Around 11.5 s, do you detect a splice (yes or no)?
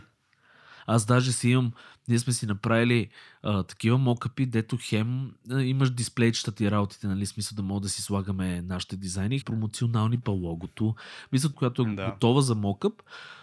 yes